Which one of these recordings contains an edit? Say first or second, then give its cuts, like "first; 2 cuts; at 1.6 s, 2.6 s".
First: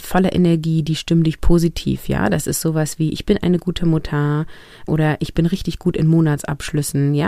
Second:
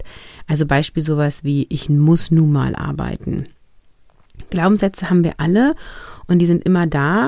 first; 1 cut; at 4.9 s